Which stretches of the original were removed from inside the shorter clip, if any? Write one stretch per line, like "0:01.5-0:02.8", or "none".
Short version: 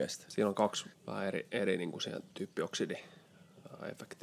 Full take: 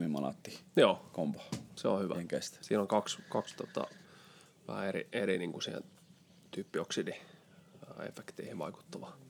0:03.2-0:04.5
0:05.9-0:06.5